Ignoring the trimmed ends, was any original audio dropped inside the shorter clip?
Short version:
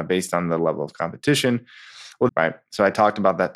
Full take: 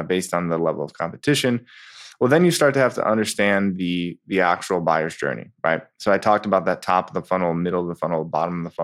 yes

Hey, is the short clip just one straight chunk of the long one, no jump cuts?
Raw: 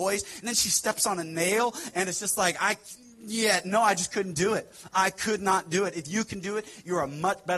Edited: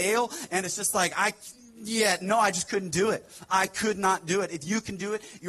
yes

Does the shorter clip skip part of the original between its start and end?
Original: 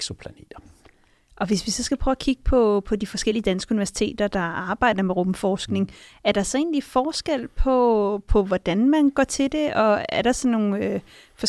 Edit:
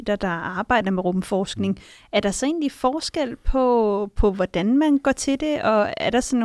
no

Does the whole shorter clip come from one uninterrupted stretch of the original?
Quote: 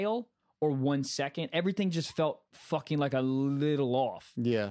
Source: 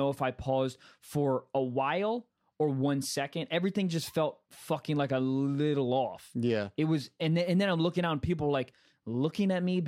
yes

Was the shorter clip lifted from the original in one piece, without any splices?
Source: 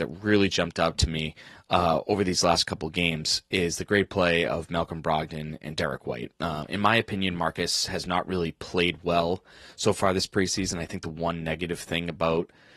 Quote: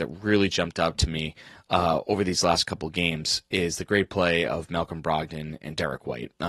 yes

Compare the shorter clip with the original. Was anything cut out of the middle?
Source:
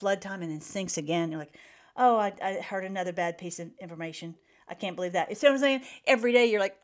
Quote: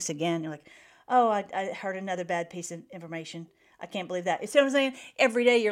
no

